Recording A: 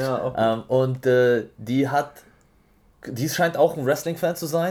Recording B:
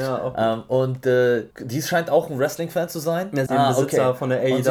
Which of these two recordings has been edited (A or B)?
B